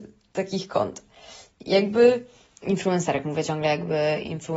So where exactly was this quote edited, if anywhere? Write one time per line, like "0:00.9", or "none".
none